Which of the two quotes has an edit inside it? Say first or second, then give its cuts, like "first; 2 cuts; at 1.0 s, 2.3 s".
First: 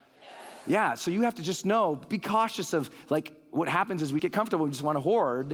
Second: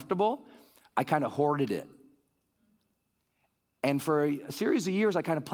first; 2 cuts; at 2.1 s, 4.2 s